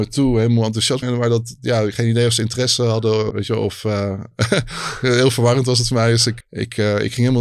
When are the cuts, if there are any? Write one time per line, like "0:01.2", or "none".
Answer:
0:01.0
0:03.3
0:06.4

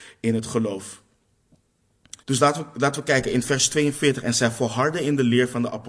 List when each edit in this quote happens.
0:02.2

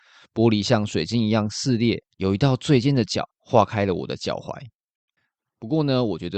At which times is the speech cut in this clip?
0:02.1
0:03.3

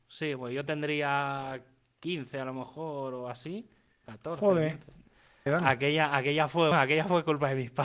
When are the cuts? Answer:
0:05.5
0:06.7

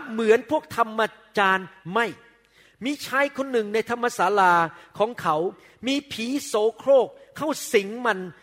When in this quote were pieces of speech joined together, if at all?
none

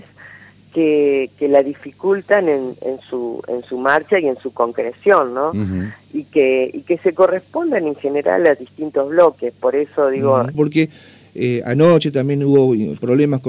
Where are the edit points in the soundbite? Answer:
0:10.5

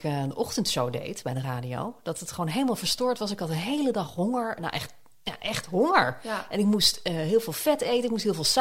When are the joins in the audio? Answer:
none

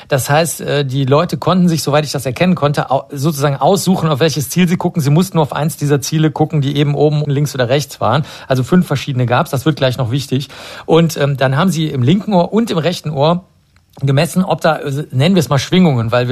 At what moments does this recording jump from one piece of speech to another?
0:07.2

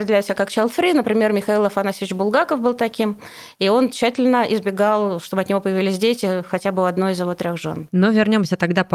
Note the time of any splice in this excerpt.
none

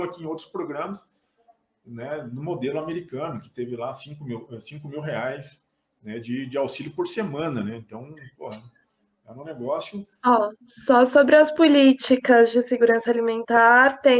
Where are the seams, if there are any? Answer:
none

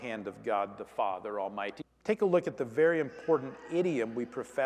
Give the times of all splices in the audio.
0:01.8

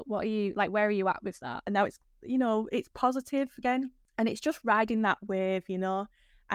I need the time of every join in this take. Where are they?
0:01.7

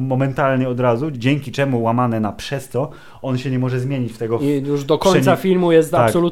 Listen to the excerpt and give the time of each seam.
0:01.1

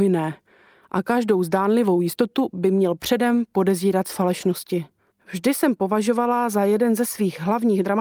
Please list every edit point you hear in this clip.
0:05.1

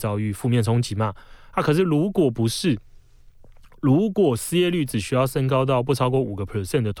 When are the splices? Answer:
none

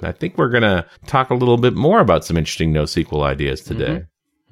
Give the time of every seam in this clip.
0:00.9

